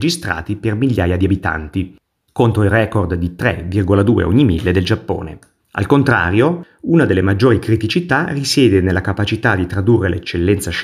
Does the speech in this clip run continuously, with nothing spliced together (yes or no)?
no